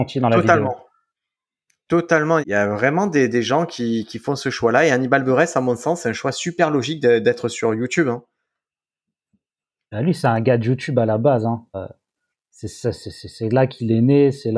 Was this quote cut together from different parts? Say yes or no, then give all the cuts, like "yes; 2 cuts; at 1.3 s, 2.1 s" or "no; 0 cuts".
yes; 2 cuts; at 2.4 s, 11.7 s